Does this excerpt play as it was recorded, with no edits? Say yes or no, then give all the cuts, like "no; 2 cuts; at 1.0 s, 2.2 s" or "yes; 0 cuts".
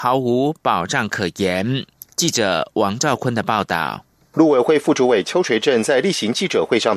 yes; 0 cuts